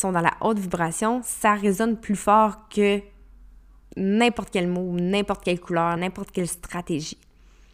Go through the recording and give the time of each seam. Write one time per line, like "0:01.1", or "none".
0:06.0

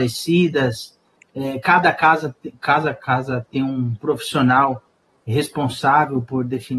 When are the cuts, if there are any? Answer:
none

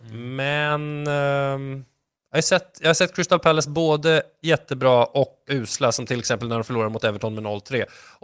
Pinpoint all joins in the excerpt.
0:05.5

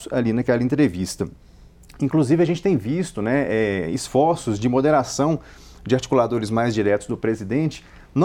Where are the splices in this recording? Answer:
none

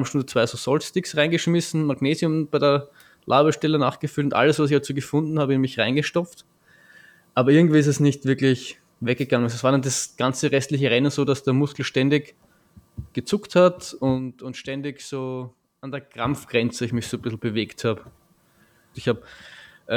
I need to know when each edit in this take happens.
0:18.9

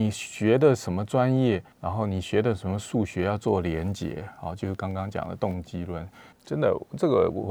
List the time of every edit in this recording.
0:01.7
0:06.3

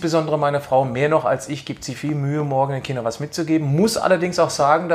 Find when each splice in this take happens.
0:01.9

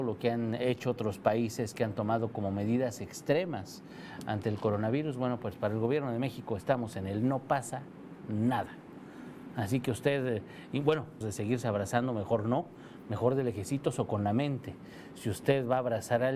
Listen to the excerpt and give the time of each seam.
0:11.2

